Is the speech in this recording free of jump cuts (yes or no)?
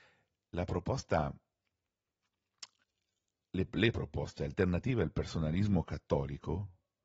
yes